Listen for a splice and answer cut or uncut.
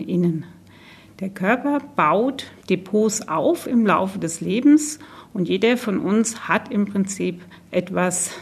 uncut